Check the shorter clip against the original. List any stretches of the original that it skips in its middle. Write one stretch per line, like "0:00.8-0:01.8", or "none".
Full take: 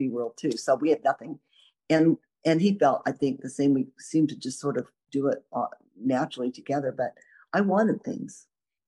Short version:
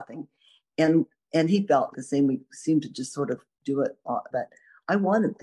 0:03.0-0:03.4
0:05.8-0:07.0

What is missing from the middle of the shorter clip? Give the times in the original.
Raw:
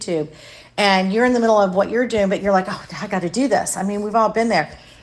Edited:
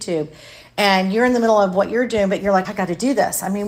0:02.6-0:03.0

